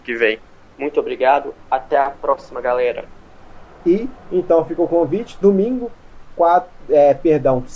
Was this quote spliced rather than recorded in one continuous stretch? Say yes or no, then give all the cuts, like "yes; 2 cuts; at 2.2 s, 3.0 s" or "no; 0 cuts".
no; 0 cuts